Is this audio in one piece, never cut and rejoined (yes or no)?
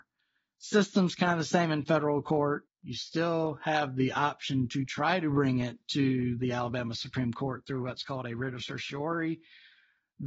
no